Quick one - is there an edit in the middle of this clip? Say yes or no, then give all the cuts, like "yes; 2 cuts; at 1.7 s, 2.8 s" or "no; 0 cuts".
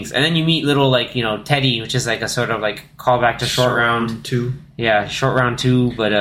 no; 0 cuts